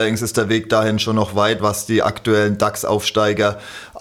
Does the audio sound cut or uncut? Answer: cut